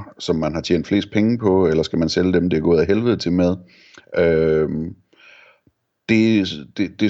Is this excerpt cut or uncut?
uncut